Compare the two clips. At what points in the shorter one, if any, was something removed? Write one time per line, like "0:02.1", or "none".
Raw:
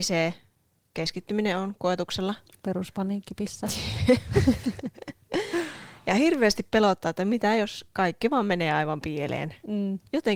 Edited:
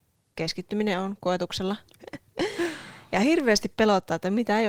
0:01.9

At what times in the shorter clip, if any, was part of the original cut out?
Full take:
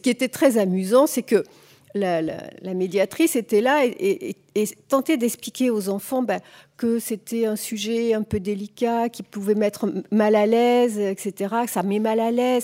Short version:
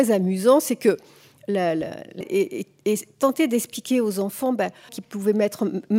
0:02.2
0:04.9

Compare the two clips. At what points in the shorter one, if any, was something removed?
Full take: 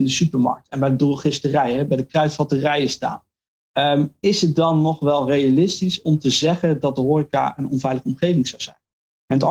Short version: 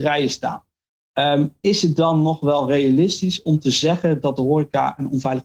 none

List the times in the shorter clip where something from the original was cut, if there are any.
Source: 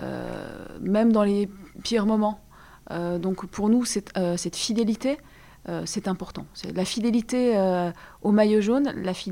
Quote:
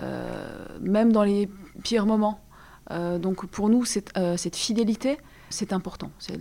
0:05.5

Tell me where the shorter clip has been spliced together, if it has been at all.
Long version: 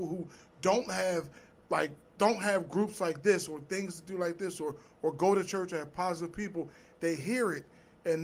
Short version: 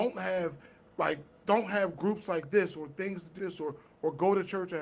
0:03.4

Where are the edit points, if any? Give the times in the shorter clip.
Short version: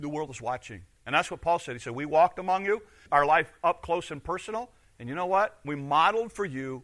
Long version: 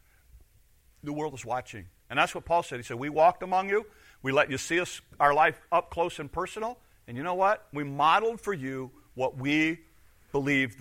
0:03.1

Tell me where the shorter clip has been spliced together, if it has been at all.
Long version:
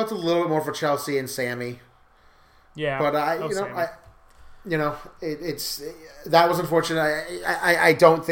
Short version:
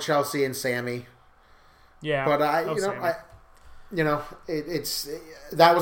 none

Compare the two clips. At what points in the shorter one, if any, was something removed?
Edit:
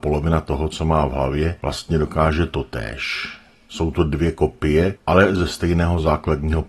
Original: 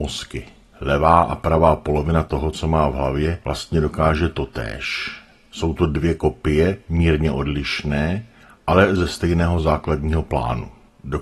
0:05.0

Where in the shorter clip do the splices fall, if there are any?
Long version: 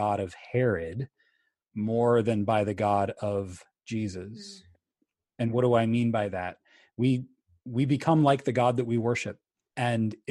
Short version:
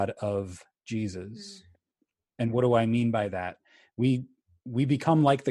none

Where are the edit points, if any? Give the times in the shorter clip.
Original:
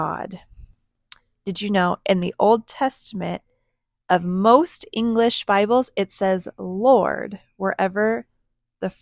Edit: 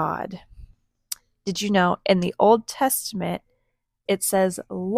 0:04.1

